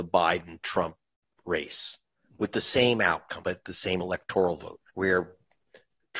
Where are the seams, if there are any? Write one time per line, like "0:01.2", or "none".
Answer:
0:03.4
0:04.9